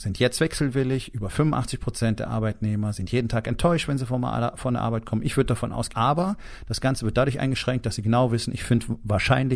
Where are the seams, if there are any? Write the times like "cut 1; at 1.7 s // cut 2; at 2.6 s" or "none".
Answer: cut 1; at 5.9 s